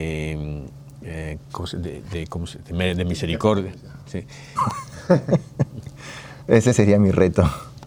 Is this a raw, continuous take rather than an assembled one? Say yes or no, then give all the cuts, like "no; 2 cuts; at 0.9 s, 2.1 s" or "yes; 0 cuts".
no; 2 cuts; at 4.6 s, 6.4 s